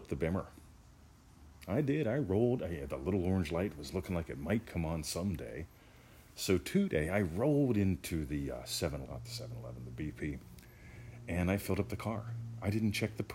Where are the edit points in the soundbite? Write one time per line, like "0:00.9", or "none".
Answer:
0:09.1